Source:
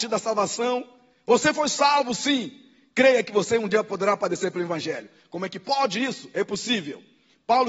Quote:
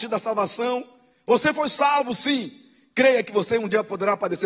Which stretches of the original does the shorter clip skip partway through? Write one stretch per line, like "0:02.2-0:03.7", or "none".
none